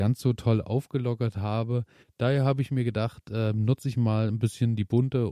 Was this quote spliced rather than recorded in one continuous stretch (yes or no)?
yes